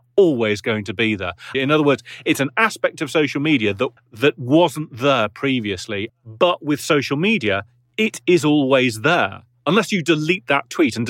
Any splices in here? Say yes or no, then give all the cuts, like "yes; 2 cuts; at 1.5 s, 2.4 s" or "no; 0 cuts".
yes; 3 cuts; at 1.5 s, 4.0 s, 6.1 s